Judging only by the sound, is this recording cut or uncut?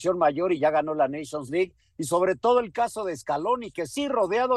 uncut